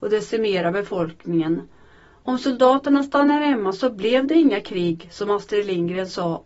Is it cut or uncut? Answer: uncut